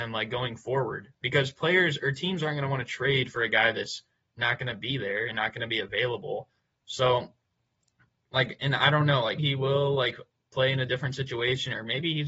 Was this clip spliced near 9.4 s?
yes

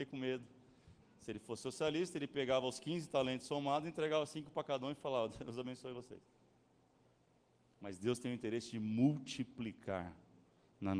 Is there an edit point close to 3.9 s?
no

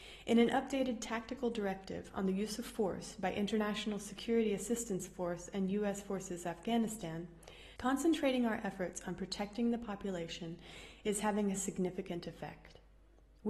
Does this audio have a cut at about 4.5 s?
no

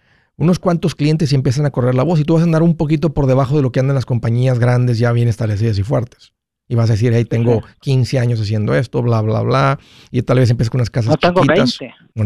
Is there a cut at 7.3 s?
no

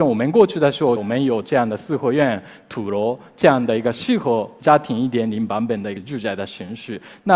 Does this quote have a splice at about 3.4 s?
no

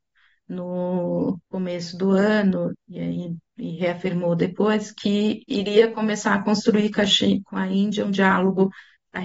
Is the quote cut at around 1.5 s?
yes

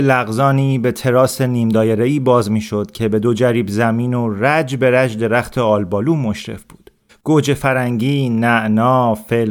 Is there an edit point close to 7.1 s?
yes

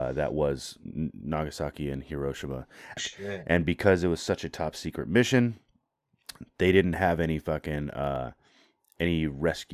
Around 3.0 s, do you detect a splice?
yes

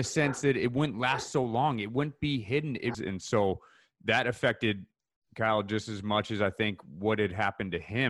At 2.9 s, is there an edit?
yes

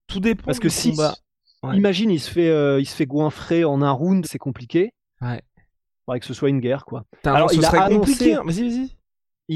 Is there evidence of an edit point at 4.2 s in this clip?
yes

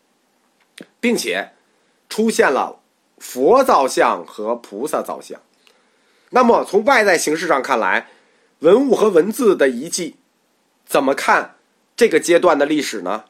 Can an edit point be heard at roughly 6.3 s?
yes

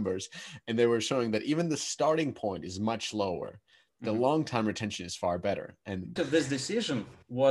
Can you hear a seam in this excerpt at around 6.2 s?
yes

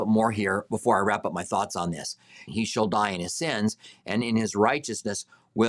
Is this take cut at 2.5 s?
yes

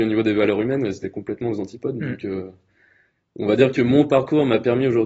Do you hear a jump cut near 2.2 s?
no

